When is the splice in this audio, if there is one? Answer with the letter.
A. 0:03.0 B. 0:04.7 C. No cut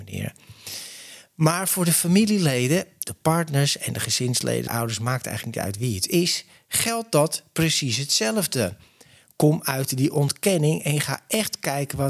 B